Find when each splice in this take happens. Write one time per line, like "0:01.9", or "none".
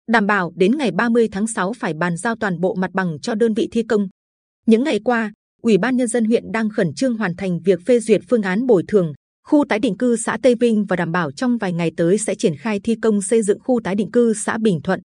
0:09.2